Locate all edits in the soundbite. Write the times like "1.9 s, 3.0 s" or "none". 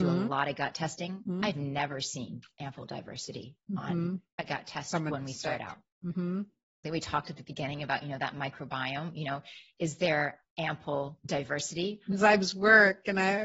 6.8 s, 12.1 s